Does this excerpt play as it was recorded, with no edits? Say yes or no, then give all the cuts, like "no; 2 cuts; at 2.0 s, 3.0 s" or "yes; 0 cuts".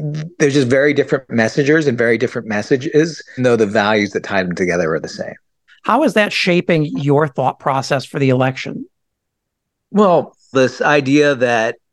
no; 3 cuts; at 3.4 s, 5.7 s, 10.5 s